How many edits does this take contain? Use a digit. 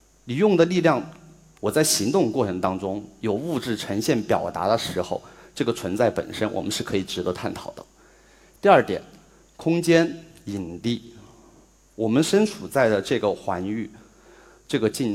1